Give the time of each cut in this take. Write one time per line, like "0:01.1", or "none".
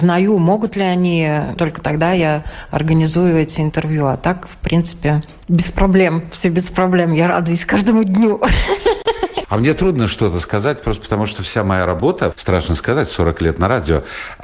0:01.6
0:12.3